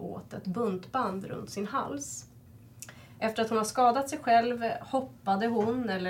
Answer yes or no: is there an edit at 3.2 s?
no